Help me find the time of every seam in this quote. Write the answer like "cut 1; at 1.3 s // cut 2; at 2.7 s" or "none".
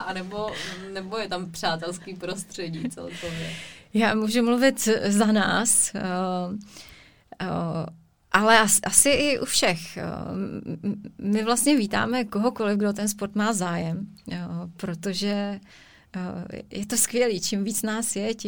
none